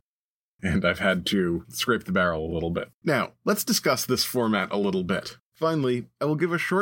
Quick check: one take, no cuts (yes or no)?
no